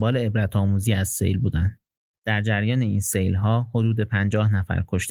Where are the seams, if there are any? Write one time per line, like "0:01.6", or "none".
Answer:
0:02.1